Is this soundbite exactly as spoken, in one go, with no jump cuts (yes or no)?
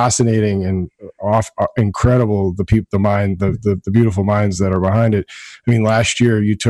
yes